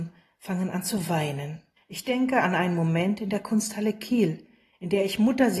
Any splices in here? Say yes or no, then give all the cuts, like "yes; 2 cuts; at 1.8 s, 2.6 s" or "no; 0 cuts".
yes; 1 cut; at 1.8 s